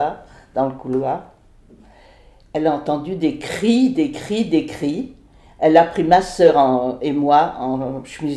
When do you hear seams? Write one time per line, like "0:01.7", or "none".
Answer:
none

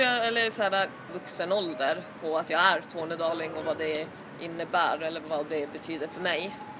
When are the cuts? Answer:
0:01.1

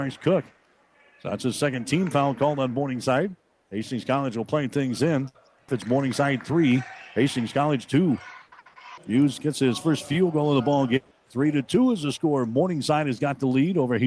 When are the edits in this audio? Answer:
0:05.7
0:09.0
0:11.1

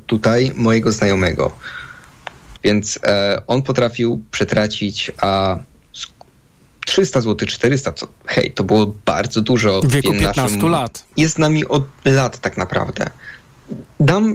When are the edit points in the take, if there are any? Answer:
0:02.6
0:11.1

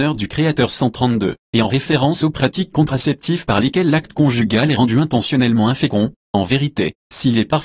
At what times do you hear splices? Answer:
0:01.4
0:06.2

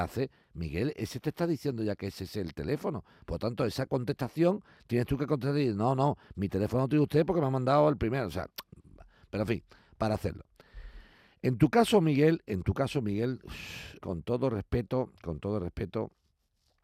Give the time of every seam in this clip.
0:14.0

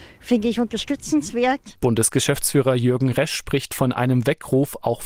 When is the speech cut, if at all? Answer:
0:01.8

